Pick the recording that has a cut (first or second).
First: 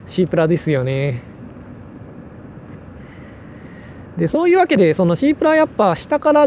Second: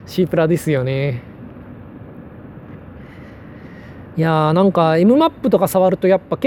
second